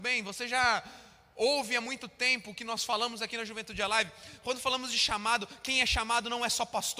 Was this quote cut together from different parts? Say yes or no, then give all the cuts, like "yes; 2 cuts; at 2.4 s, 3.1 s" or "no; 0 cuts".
no; 0 cuts